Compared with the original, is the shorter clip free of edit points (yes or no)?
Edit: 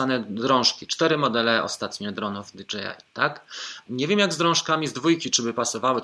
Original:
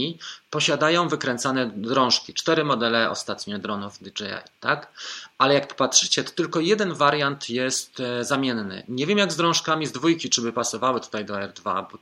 no